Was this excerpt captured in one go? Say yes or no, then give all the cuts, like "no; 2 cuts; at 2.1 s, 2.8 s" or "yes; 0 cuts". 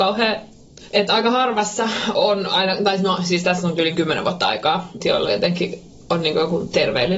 no; 1 cut; at 5.0 s